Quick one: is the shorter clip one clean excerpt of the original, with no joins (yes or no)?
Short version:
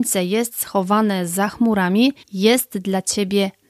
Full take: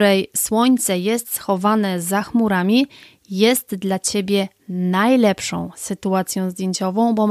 no